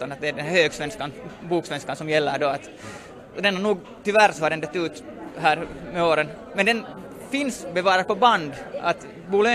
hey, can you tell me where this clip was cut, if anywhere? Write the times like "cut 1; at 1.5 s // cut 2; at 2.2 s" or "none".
none